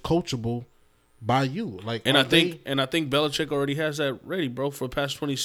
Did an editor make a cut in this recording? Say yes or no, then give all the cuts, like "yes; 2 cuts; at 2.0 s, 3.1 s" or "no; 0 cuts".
no; 0 cuts